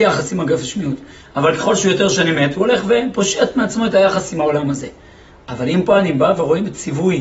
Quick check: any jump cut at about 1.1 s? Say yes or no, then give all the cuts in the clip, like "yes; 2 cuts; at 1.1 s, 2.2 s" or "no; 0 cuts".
no; 0 cuts